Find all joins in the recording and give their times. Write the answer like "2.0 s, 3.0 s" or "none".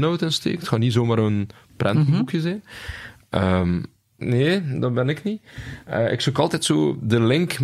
4.2 s